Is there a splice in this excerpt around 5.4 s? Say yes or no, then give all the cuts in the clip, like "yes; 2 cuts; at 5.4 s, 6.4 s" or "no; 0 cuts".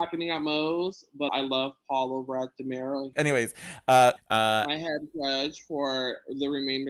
no; 3 cuts; at 1.3 s, 3.1 s, 4.2 s